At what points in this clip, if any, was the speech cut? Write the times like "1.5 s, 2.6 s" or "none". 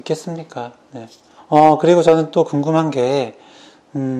1.4 s